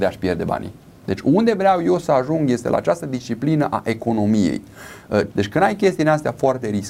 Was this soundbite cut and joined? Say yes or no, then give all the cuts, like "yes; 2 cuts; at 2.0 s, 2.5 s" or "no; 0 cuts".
yes; 2 cuts; at 1.0 s, 5.3 s